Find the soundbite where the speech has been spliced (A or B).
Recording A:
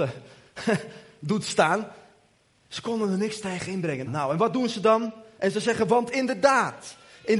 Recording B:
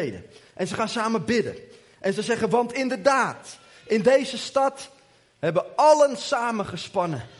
A